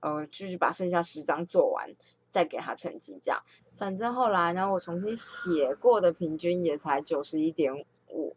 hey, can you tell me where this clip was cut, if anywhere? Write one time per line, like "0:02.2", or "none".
0:03.6